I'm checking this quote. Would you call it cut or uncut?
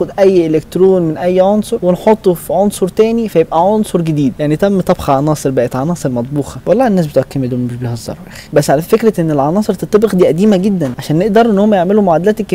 cut